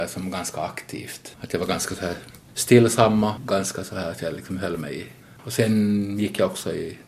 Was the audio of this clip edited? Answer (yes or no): yes